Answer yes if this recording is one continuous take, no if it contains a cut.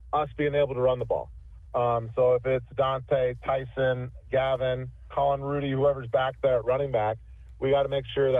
no